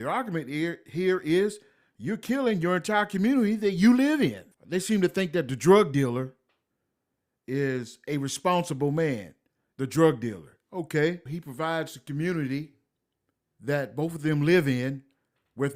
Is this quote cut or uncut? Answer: cut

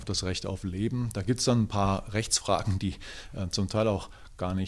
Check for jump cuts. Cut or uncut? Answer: uncut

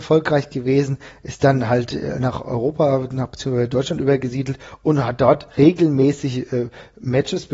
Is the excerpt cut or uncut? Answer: uncut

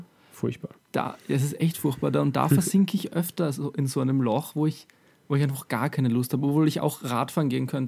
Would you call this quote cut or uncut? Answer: uncut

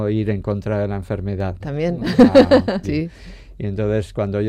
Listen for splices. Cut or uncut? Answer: cut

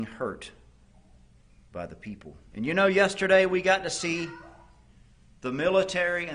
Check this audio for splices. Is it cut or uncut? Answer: cut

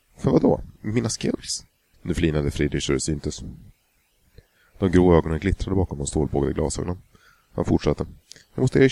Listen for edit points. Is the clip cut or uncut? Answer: cut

